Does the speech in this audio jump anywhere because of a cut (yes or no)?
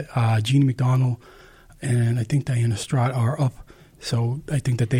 no